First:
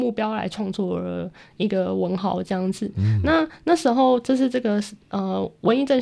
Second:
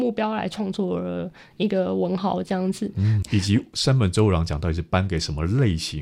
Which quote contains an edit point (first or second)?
second